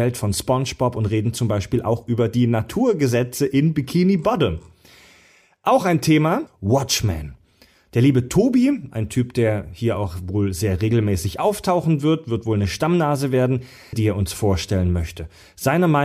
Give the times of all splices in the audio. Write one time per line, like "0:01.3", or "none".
0:06.5
0:13.9